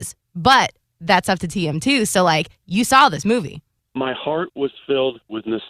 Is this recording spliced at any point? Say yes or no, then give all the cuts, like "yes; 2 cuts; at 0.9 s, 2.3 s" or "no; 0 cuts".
no; 0 cuts